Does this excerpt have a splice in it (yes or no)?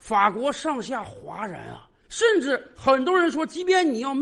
yes